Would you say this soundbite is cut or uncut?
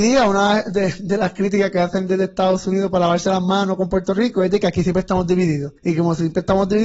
cut